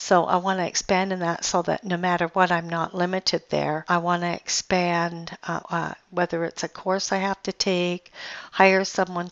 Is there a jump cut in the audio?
yes; 1 cut; at 5.6 s

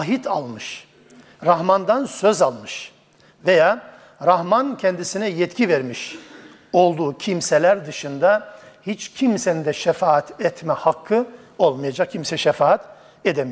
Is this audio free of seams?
yes; 0 cuts

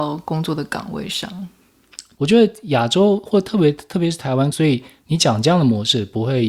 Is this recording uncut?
no; 2 cuts; at 2.2 s, 4.5 s

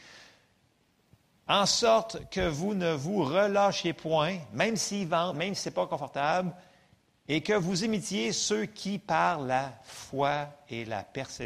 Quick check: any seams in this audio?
yes; 1 cut; at 5.3 s

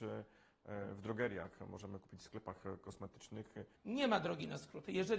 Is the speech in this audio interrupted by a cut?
yes; 1 cut; at 3.8 s

